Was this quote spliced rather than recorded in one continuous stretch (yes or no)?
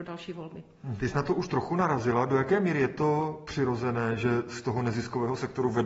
yes